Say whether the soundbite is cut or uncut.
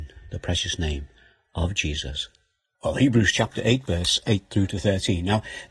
cut